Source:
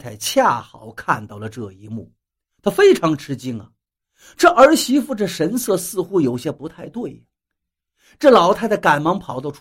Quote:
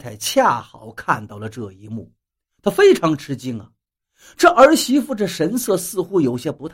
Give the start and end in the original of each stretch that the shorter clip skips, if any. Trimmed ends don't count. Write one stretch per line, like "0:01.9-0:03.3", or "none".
none